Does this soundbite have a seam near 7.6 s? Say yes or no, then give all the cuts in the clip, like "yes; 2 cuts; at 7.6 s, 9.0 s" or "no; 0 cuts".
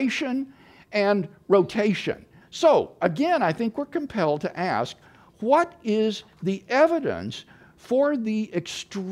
no; 1 cut; at 2.4 s